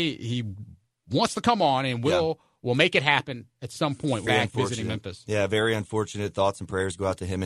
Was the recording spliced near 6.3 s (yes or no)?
no